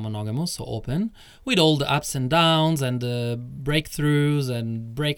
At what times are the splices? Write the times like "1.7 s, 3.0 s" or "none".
none